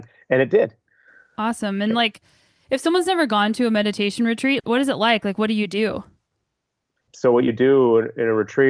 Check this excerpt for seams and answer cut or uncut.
cut